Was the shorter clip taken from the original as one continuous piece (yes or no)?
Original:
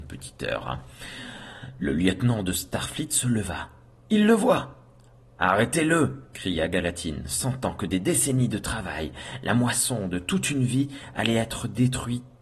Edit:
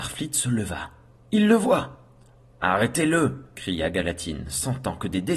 yes